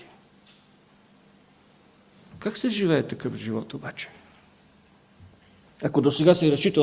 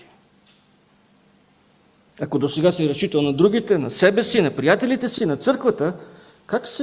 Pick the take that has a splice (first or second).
second